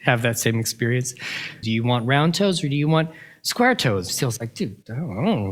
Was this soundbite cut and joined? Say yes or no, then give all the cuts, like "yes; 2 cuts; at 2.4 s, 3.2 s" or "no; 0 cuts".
yes; 2 cuts; at 1.6 s, 4.1 s